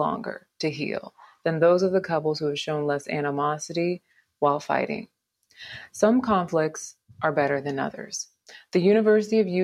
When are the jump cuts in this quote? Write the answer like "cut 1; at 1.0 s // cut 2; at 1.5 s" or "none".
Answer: none